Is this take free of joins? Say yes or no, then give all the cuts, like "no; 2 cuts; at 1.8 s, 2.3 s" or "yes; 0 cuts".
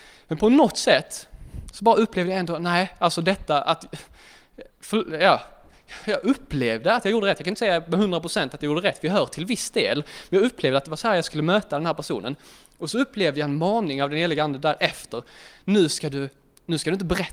yes; 0 cuts